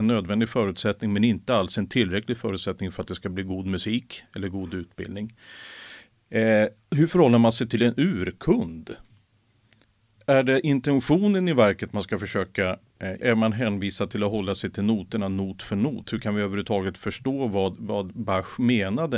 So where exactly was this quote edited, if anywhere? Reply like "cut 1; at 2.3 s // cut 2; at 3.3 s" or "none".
cut 1; at 13.2 s